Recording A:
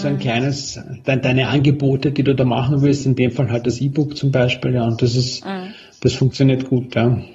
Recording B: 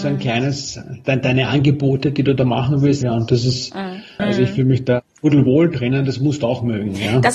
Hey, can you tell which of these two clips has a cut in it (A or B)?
B